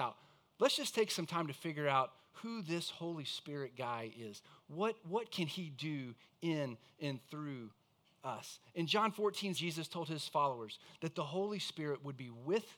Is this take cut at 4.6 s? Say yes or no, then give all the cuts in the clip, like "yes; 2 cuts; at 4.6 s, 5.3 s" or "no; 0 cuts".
no; 1 cut; at 9.5 s